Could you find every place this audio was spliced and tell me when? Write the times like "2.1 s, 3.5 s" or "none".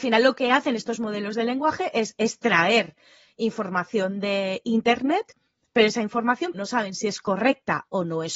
6.5 s